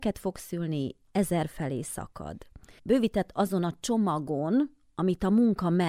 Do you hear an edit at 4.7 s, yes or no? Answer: no